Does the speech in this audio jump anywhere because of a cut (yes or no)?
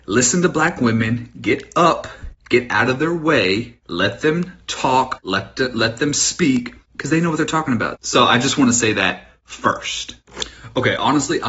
yes